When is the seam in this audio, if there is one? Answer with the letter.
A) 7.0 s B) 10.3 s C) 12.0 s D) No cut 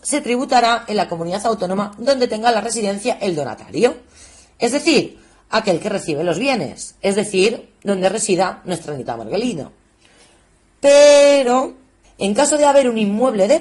C